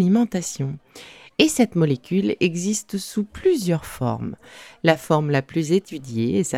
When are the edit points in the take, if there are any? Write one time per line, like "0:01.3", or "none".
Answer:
none